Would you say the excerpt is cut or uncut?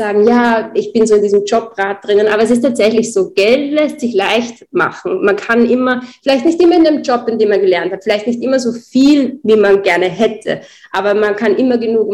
uncut